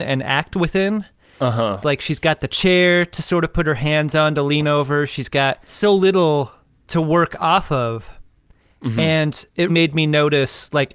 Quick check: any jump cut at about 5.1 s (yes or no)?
no